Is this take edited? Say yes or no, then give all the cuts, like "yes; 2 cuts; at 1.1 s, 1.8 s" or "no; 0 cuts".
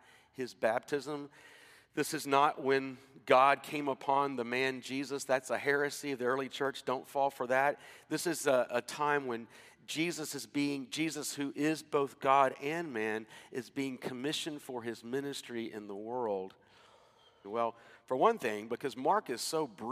yes; 1 cut; at 17.4 s